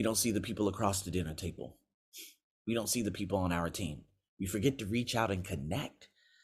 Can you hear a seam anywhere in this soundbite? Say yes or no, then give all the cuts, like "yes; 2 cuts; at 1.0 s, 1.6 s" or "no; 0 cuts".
no; 0 cuts